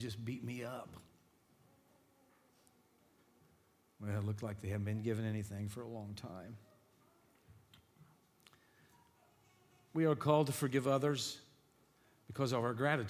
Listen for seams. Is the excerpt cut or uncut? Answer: uncut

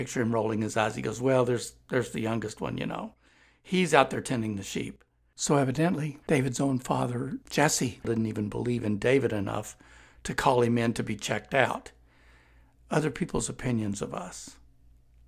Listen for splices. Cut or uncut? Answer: uncut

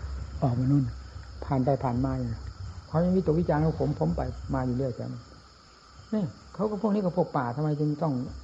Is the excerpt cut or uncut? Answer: uncut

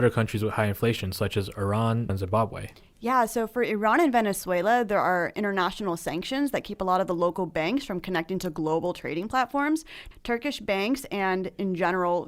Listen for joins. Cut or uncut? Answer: cut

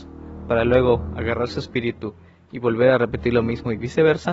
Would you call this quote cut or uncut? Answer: uncut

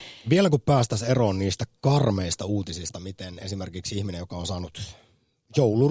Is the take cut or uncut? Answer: uncut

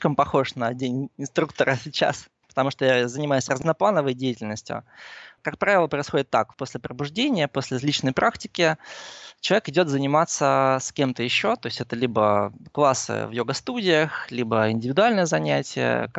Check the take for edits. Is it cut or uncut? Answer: uncut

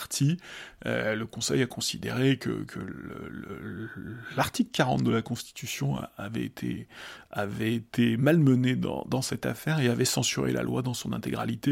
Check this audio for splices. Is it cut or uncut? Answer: uncut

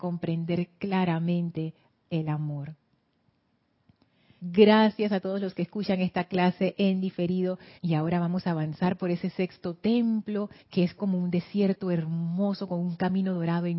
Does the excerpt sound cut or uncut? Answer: cut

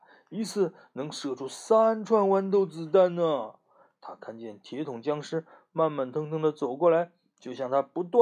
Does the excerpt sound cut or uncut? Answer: uncut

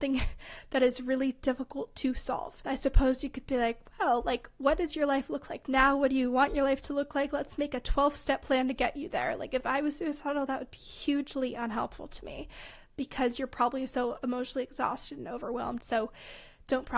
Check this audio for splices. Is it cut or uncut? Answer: cut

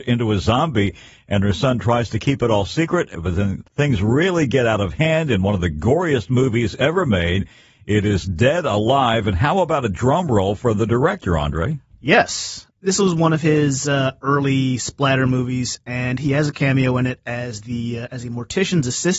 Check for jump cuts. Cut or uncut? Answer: cut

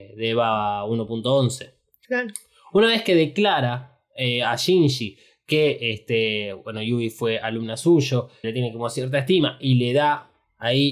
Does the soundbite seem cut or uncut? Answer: cut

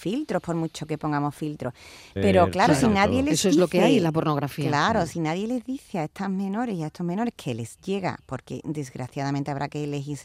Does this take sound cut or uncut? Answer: cut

